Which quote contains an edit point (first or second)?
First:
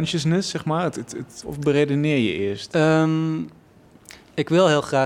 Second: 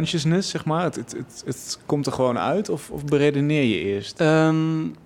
first